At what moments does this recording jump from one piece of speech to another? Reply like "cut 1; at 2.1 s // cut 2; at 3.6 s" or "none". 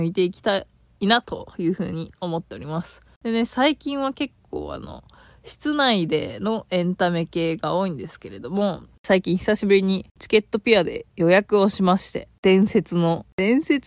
cut 1; at 3.1 s